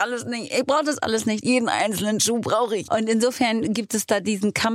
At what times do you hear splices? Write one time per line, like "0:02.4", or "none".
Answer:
0:01.4
0:02.9